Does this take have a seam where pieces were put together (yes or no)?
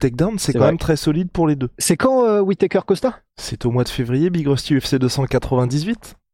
no